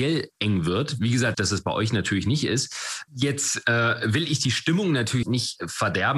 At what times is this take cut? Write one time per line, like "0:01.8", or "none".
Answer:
0:01.3
0:03.1
0:05.2